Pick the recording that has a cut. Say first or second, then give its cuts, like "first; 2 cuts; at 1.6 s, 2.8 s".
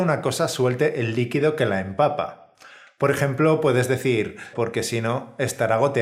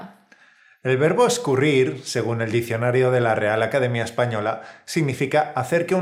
first; 1 cut; at 4.5 s